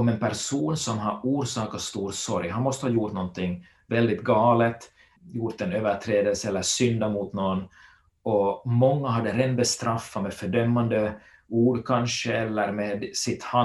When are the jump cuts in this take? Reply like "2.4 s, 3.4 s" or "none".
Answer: 5.2 s